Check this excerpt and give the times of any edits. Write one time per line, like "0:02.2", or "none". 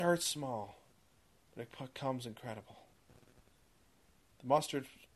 none

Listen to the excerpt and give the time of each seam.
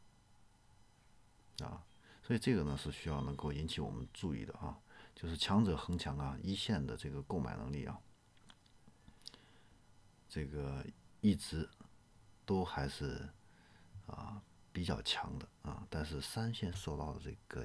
0:16.7

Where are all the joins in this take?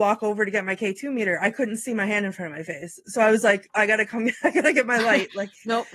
0:03.7

